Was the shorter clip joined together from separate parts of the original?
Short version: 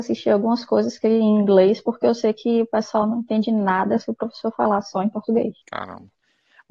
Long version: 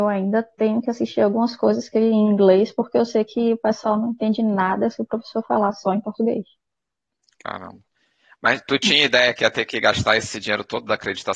yes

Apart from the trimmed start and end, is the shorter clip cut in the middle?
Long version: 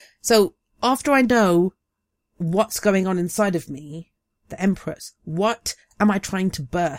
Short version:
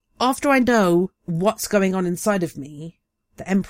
yes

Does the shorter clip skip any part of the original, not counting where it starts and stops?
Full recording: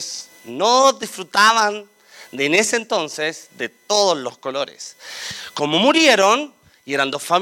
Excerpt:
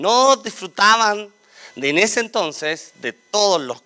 no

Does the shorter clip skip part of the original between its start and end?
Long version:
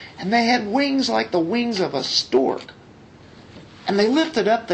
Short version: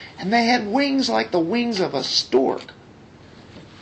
no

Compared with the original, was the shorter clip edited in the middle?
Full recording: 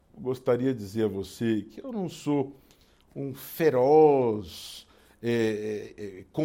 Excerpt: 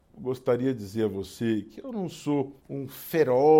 yes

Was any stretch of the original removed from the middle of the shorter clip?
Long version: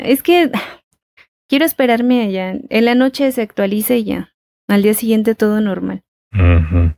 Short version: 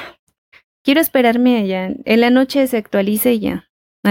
no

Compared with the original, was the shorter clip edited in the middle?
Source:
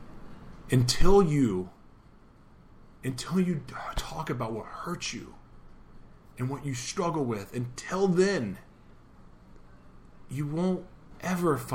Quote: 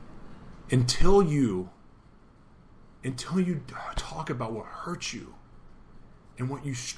no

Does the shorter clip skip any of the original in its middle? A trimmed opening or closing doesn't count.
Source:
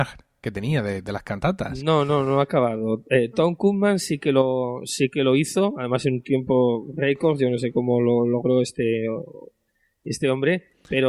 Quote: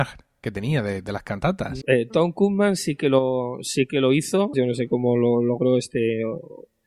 yes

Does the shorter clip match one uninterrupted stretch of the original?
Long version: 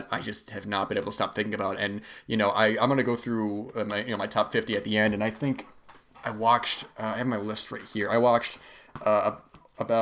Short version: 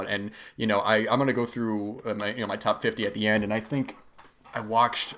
yes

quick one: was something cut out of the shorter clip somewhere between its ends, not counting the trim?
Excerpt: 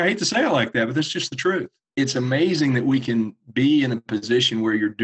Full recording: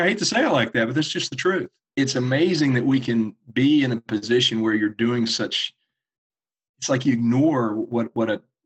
no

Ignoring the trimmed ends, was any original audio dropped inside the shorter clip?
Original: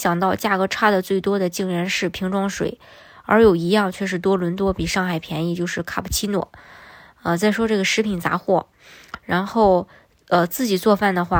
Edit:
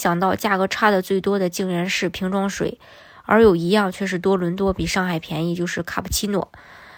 no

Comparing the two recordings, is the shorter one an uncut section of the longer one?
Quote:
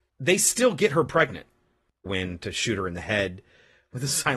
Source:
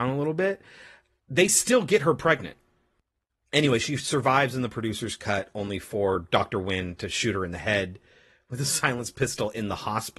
no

